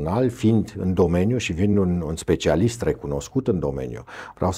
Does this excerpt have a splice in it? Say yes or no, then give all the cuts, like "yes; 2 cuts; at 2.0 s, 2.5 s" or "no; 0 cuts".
no; 0 cuts